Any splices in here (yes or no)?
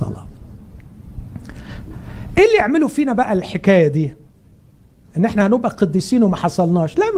no